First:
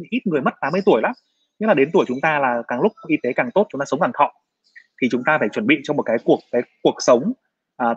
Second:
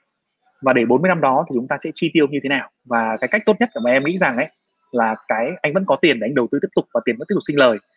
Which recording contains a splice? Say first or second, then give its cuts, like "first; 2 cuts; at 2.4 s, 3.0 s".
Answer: second; 1 cut; at 2.8 s